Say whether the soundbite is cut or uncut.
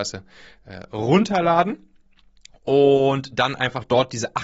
uncut